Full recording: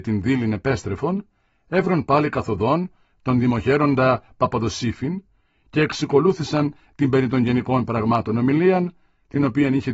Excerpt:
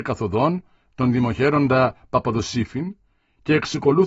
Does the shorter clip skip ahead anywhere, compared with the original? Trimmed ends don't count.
no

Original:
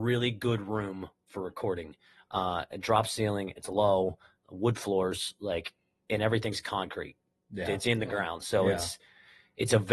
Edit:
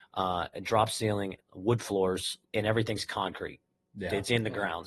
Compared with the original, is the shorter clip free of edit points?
no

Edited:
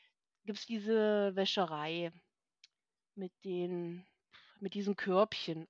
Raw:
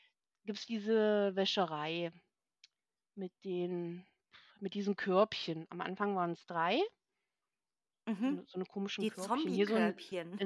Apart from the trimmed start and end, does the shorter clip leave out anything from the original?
no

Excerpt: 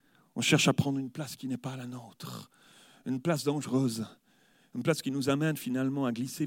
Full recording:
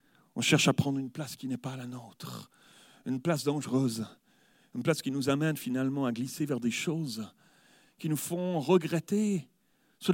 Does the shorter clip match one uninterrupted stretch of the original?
yes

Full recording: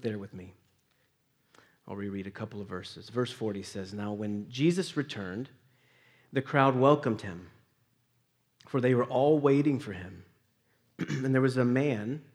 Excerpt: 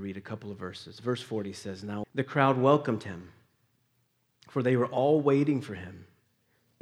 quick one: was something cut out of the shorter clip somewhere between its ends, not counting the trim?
yes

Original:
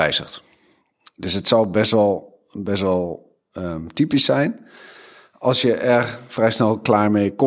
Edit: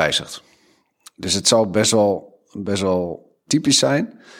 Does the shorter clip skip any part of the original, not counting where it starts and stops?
yes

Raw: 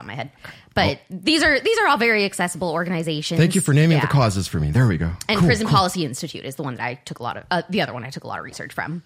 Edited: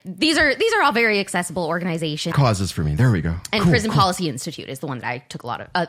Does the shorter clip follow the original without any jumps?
no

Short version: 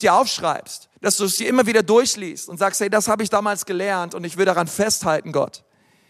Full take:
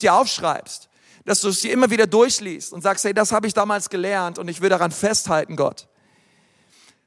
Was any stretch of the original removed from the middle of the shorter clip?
yes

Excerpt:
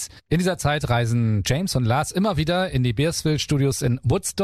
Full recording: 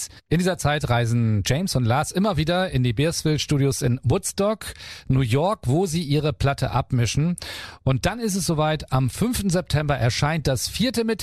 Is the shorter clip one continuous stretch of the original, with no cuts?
yes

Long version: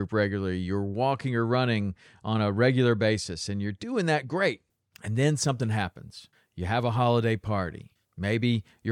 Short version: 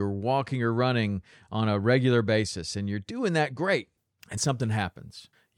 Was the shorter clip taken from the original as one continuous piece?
no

